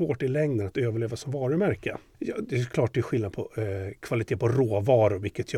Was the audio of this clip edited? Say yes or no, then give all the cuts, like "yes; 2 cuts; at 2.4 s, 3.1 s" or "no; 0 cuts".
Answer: yes; 1 cut; at 2.1 s